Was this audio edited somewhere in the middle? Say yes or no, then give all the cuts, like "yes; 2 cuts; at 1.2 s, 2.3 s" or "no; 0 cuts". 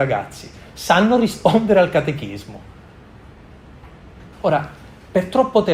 yes; 1 cut; at 4.3 s